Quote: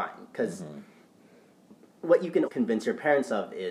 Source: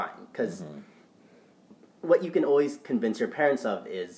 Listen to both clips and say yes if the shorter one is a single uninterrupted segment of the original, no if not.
no